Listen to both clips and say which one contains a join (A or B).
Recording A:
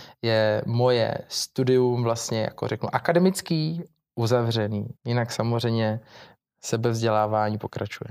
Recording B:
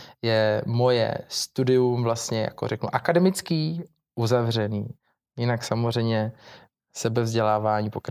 A